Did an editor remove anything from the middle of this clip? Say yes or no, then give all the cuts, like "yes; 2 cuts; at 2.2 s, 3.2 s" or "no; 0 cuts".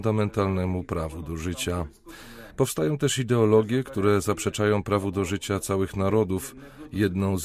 no; 0 cuts